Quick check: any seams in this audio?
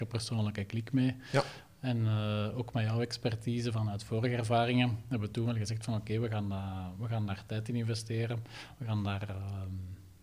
no; 0 cuts

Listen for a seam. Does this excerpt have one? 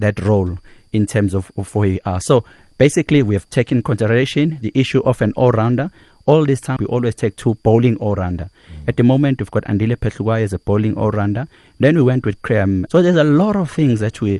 yes; 2 cuts; at 6.8 s, 12.9 s

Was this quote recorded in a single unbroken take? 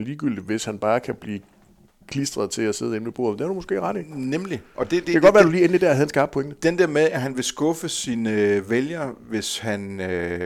yes; 0 cuts

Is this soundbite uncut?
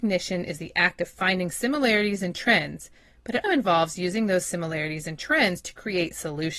no; 1 cut; at 3.4 s

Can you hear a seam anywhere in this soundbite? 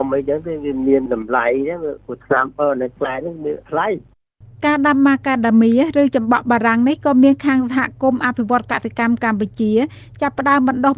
no; 0 cuts

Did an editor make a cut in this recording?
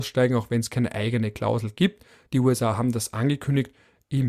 no; 0 cuts

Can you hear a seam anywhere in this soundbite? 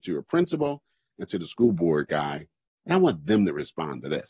no; 0 cuts

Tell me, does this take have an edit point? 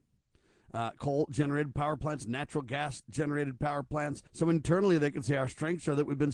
yes; 1 cut; at 4.3 s

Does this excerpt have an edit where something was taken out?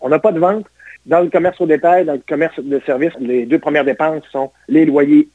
yes; 2 cuts; at 1.0 s, 3.1 s

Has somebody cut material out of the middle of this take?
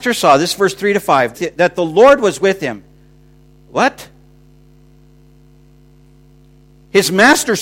yes; 1 cut; at 1.3 s

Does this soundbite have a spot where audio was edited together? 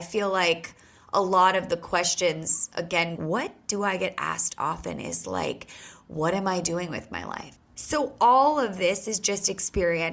yes; 2 cuts; at 3.2 s, 7.6 s

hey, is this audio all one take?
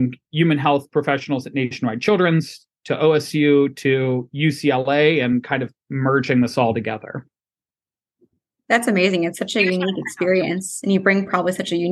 yes; 0 cuts

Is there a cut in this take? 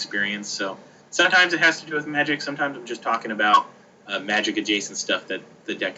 no; 0 cuts

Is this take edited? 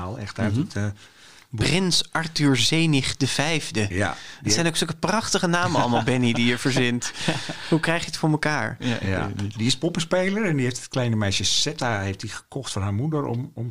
no; 0 cuts

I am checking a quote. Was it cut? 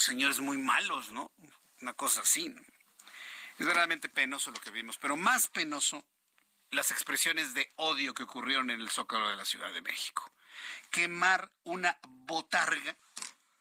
no; 0 cuts

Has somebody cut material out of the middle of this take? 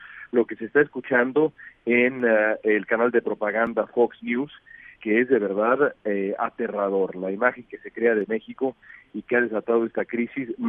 yes; 1 cut; at 5.0 s

